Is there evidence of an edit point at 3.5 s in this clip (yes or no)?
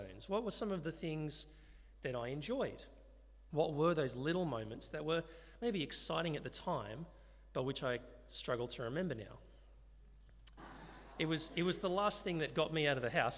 yes